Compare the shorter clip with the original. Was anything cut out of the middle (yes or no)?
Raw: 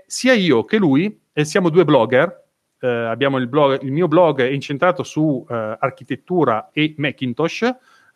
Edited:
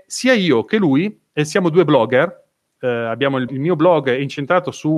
yes